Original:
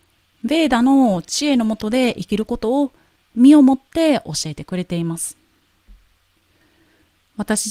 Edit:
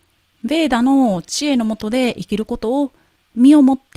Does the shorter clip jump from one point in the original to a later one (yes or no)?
no